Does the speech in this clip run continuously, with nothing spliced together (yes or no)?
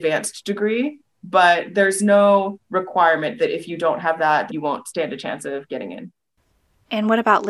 no